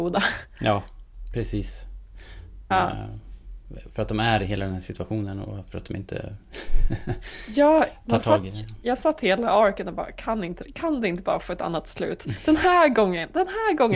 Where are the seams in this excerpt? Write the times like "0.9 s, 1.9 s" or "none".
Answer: 2.7 s